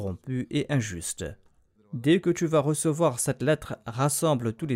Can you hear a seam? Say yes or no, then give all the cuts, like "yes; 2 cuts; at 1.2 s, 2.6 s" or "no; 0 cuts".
yes; 1 cut; at 1.8 s